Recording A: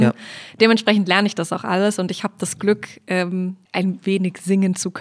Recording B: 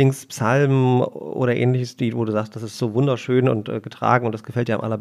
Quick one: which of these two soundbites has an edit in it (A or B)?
A